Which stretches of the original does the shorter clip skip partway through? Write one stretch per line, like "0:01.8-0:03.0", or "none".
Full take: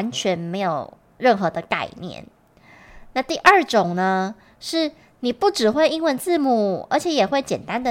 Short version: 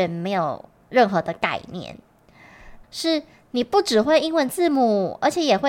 0:03.1-0:04.5